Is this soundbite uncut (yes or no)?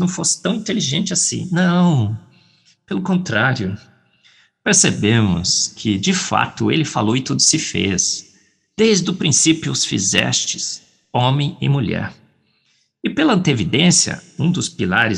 yes